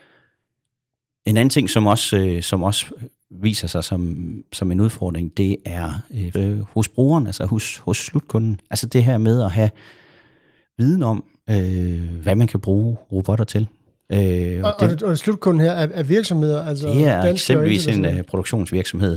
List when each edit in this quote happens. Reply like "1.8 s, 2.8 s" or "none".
6.3 s